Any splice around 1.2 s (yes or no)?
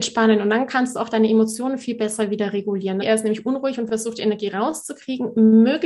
no